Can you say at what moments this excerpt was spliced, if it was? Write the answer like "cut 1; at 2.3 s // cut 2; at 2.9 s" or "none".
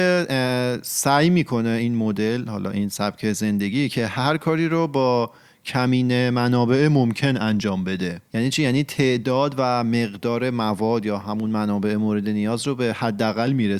cut 1; at 8.3 s